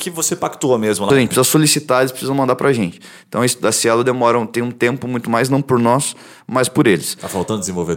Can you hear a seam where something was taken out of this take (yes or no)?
yes